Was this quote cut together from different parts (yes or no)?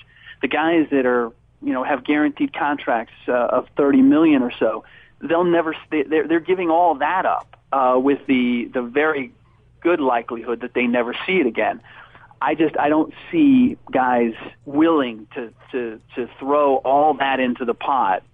yes